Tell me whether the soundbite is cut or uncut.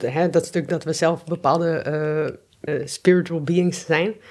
cut